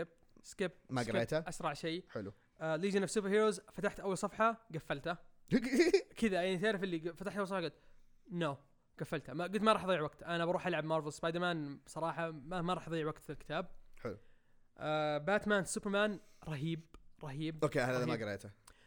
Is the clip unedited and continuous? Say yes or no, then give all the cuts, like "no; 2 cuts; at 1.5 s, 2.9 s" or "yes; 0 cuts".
yes; 0 cuts